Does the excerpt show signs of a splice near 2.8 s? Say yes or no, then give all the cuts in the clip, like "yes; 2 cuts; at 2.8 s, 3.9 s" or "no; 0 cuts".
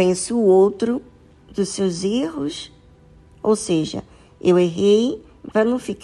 no; 0 cuts